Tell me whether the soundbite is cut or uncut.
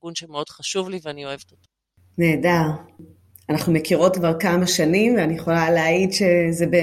uncut